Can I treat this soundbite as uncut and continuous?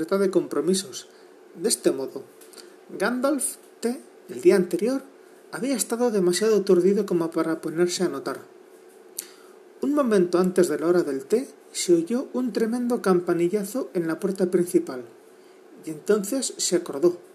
no; 2 cuts; at 4.2 s, 11.6 s

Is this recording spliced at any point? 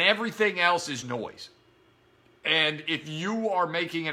yes; 1 cut; at 1.0 s

